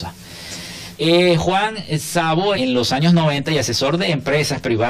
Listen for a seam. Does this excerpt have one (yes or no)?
yes